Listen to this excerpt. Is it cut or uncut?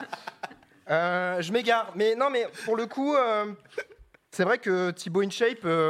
uncut